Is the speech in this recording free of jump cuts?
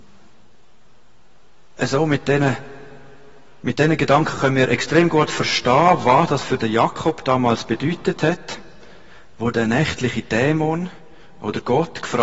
yes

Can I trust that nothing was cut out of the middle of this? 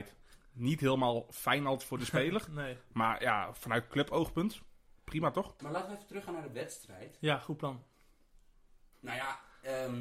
no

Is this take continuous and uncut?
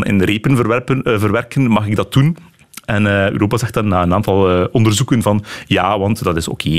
yes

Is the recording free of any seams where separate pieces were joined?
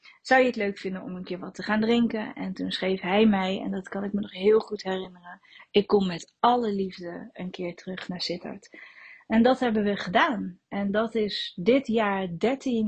yes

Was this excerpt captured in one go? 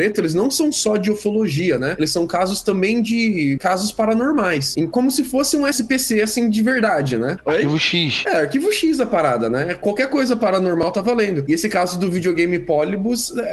yes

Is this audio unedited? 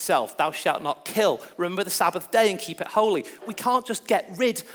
no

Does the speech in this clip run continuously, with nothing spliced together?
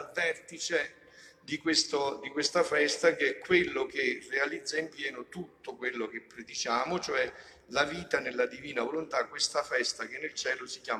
yes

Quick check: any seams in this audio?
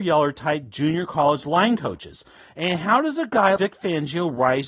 yes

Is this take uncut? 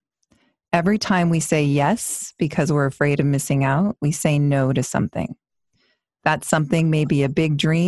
yes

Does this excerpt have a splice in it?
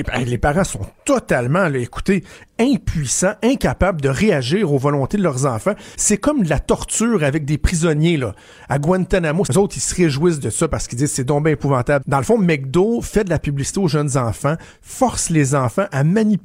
yes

